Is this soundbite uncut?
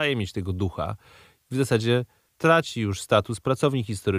yes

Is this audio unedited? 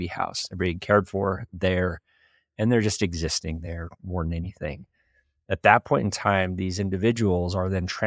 yes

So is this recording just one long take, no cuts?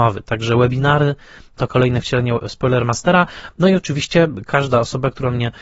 no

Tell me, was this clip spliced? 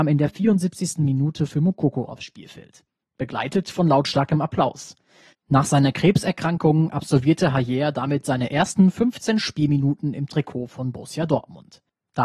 no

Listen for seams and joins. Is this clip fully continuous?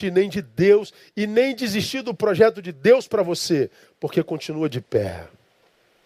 yes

